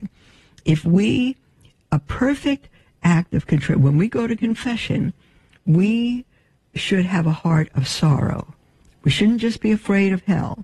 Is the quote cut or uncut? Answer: uncut